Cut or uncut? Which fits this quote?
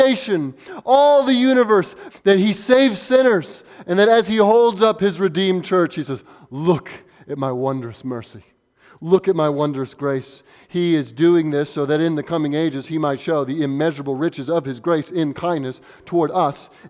cut